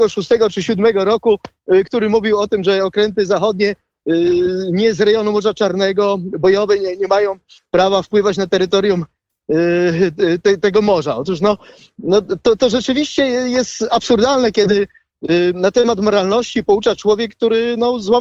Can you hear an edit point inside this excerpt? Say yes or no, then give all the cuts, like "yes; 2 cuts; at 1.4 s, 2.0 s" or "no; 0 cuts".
no; 0 cuts